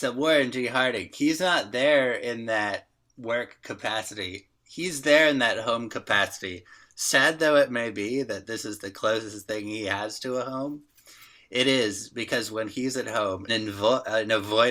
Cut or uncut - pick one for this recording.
cut